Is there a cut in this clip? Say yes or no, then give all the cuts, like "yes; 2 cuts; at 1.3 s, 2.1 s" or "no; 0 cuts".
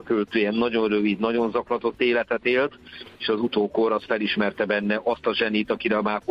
yes; 1 cut; at 3.2 s